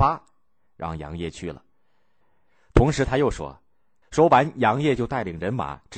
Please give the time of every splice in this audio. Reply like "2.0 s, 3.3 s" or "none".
2.2 s, 4.0 s